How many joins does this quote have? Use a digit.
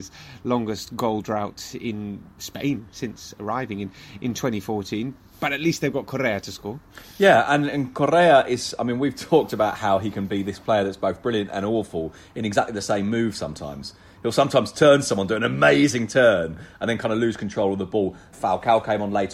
1